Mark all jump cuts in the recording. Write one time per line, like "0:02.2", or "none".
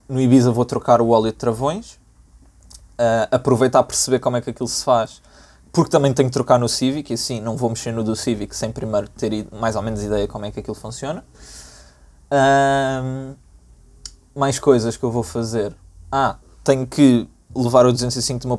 none